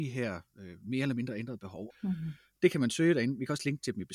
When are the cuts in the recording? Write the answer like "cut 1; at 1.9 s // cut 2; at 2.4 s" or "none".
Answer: cut 1; at 1.9 s